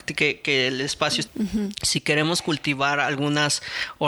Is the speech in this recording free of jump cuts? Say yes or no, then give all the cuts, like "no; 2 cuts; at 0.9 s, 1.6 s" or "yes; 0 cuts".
no; 1 cut; at 1.3 s